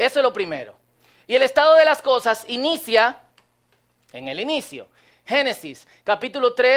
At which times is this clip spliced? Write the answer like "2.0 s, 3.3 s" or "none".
none